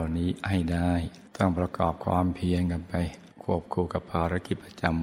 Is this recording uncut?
no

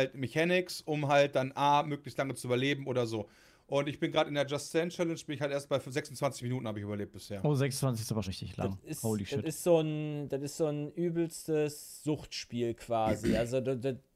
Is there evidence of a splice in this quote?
yes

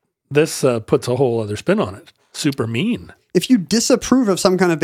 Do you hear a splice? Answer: no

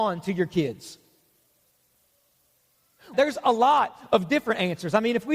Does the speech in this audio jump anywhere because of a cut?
yes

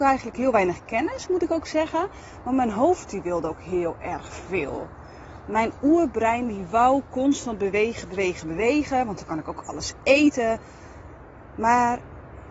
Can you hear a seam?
no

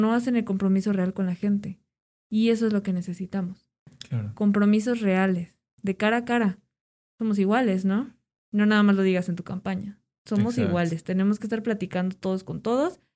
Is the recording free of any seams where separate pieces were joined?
yes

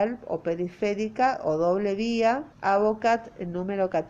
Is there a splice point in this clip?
yes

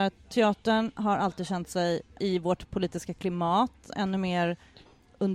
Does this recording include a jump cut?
yes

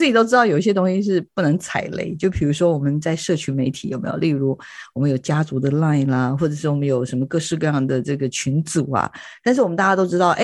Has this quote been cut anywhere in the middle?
no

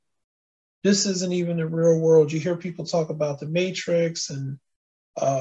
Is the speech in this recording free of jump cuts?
yes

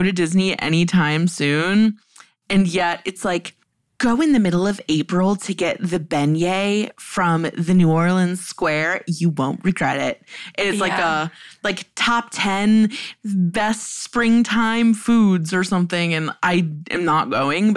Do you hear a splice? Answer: no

